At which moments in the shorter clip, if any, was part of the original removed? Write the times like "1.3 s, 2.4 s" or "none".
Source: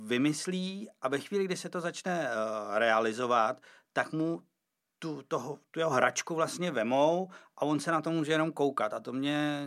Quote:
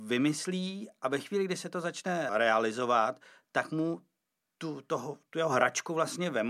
2.3 s